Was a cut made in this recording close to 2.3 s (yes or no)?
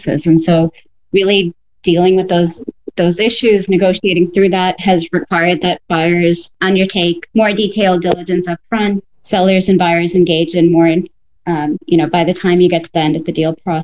no